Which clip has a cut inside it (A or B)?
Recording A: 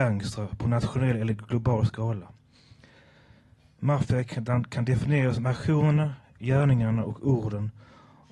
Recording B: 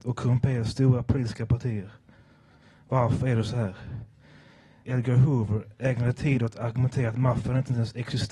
B